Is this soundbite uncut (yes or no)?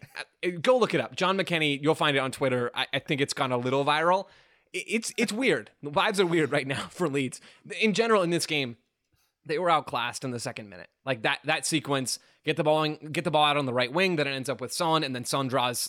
yes